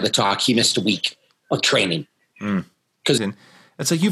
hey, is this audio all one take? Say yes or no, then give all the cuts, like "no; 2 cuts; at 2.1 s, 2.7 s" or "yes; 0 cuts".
no; 1 cut; at 3.2 s